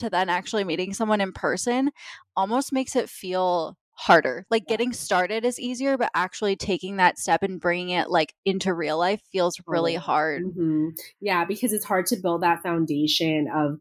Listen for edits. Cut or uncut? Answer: uncut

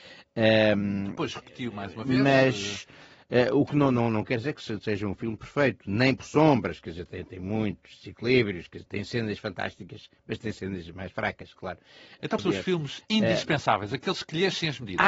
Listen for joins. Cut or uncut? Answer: cut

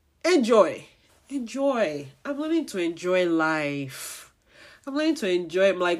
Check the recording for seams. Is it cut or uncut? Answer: cut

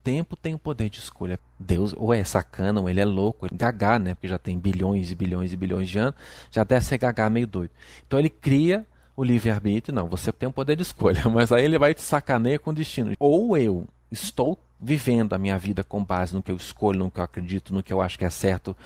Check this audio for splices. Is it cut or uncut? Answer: cut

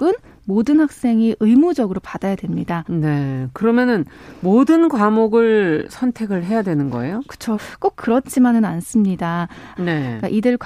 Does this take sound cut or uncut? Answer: cut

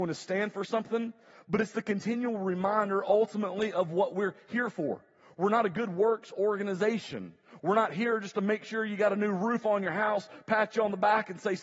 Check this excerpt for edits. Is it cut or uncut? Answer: uncut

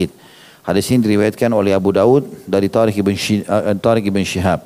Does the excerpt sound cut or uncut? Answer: uncut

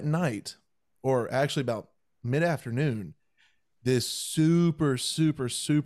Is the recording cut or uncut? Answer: uncut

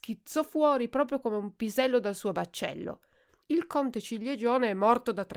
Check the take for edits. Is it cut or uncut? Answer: cut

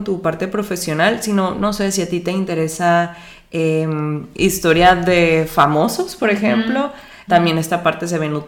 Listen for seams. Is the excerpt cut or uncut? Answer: cut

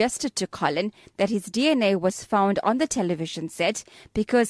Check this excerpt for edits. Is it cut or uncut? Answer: uncut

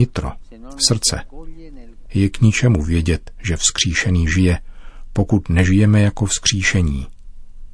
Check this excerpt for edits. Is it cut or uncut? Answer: cut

